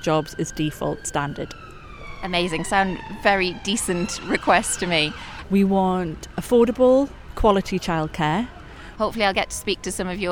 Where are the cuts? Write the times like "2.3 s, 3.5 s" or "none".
5.4 s, 9.0 s

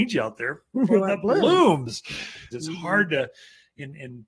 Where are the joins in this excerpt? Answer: 2.5 s

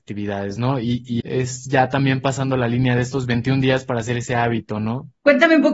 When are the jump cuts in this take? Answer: 1.2 s

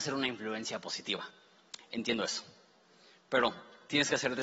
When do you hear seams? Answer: none

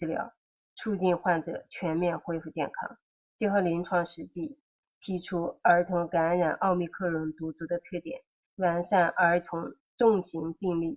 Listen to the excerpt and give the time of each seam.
3.3 s

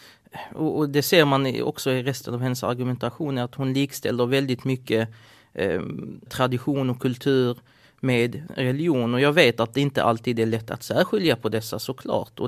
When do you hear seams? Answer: 6.3 s

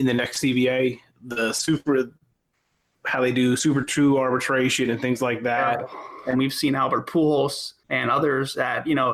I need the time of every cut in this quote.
6.3 s, 7.8 s

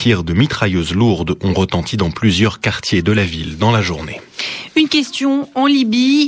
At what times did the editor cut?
none

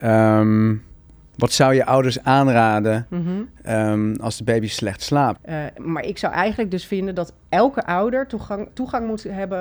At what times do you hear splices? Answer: 5.4 s, 8.7 s

